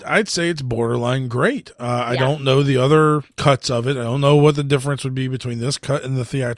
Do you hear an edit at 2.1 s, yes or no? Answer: no